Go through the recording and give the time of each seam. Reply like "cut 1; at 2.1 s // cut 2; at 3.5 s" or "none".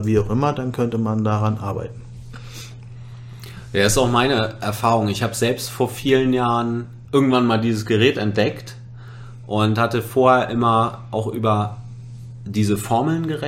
none